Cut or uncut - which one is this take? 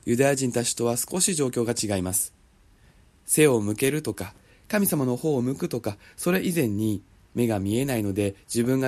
uncut